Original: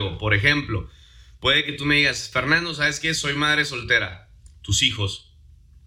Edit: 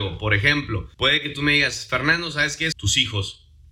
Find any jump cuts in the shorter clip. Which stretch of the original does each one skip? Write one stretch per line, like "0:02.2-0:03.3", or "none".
0:00.9-0:01.4
0:03.2-0:04.6